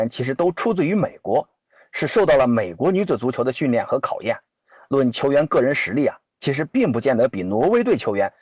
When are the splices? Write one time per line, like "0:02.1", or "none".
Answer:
none